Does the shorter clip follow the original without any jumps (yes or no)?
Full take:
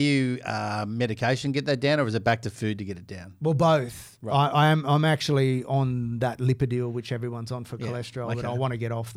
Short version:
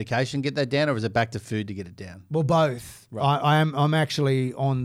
yes